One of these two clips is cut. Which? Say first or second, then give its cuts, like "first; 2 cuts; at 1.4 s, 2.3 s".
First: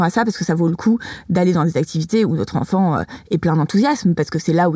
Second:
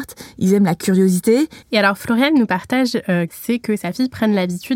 second; 2 cuts; at 1.6 s, 3.3 s